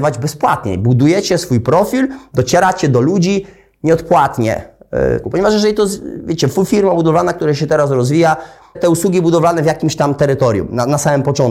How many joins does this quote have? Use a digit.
2